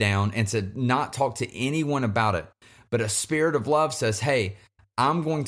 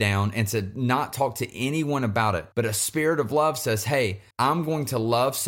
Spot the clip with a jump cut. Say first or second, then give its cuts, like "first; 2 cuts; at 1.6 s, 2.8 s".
second; 2 cuts; at 2.5 s, 4.3 s